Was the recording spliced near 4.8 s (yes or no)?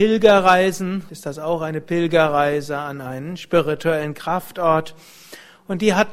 no